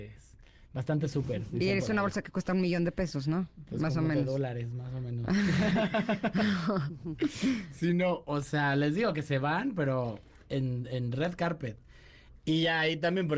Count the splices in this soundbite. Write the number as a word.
one